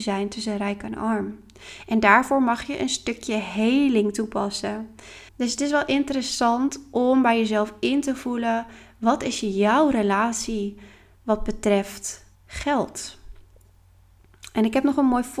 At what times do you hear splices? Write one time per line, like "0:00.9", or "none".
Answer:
0:05.3
0:12.3